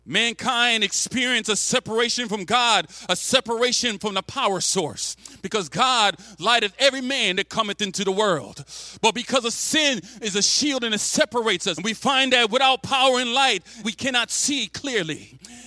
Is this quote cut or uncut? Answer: cut